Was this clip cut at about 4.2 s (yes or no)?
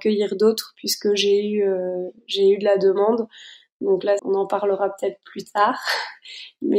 yes